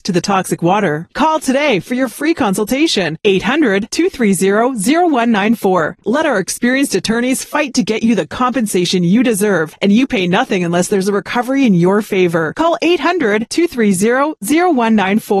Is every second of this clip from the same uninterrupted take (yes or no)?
yes